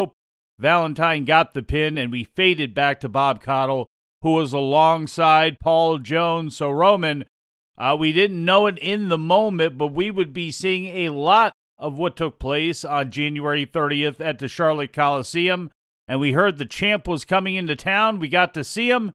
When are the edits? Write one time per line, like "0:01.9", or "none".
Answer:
none

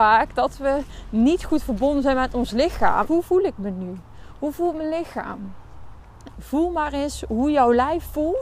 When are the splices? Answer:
0:03.0
0:06.3

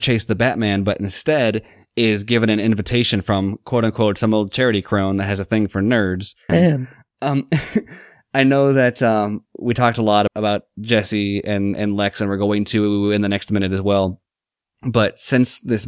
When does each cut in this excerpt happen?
0:06.5
0:10.3

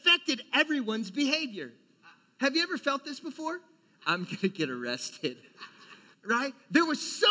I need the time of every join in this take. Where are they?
0:04.0
0:06.1

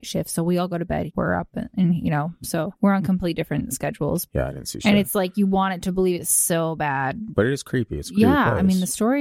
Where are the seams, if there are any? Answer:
0:01.1
0:04.3

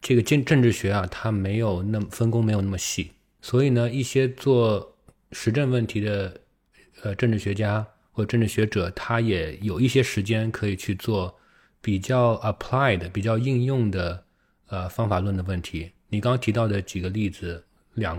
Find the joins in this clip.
none

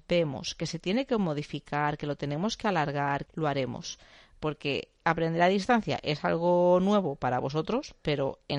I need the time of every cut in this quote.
0:03.3

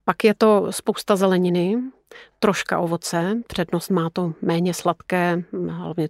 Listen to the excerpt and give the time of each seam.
none

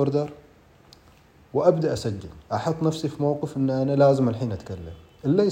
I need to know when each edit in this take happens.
0:02.5

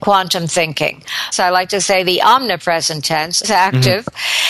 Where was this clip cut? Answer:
0:01.3
0:03.4

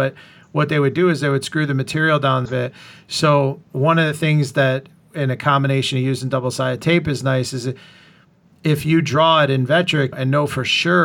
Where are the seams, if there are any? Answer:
0:02.5
0:03.7
0:10.1

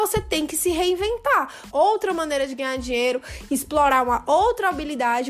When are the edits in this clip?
0:01.7

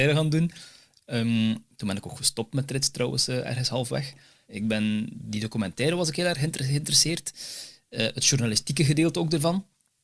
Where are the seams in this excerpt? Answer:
0:04.4

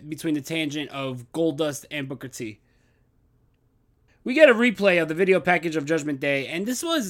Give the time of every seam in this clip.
0:04.1

